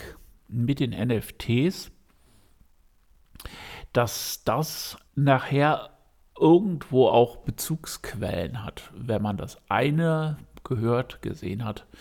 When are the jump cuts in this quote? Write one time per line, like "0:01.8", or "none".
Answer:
0:05.1